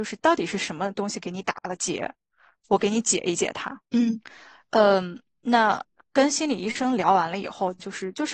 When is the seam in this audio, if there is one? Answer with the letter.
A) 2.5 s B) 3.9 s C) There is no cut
B